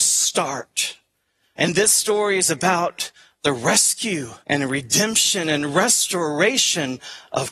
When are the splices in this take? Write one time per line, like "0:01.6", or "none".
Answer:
0:01.6
0:04.4